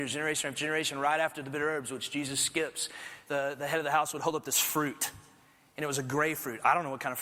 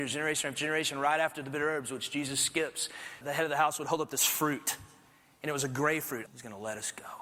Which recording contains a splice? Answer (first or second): second